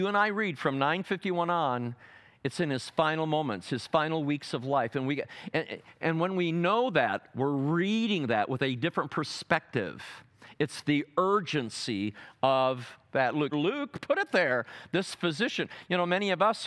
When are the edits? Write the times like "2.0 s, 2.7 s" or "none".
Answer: 13.5 s